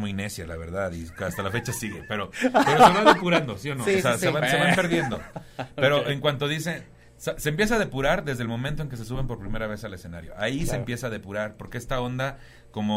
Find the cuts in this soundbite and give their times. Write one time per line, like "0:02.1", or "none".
none